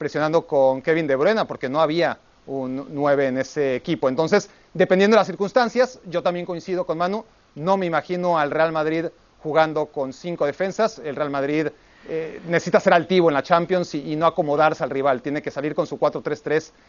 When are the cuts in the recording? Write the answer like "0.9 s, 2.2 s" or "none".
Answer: none